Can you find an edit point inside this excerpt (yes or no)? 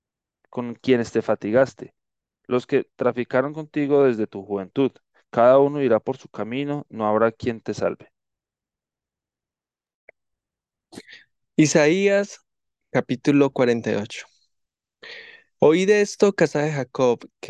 no